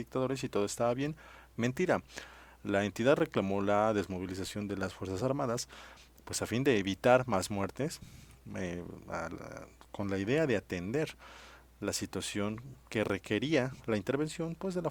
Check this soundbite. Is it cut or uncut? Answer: uncut